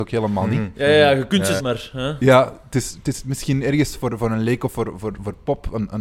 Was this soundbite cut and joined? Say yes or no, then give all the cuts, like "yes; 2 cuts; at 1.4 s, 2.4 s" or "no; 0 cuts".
yes; 1 cut; at 1.6 s